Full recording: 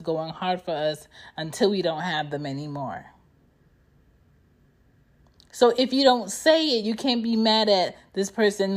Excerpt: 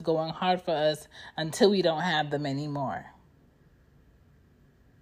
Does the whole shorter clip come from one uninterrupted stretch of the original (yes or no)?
yes